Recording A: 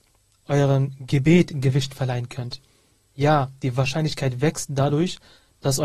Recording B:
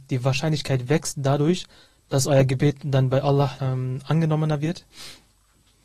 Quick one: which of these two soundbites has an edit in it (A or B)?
B